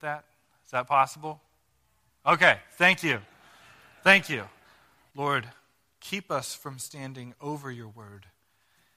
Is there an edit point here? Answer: yes; 1 cut; at 5.1 s

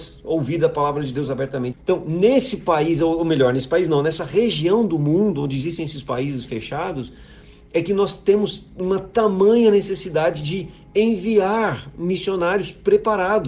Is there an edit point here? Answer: yes; 1 cut; at 1.7 s

